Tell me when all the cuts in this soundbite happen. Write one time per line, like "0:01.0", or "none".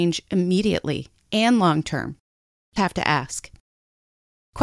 0:02.8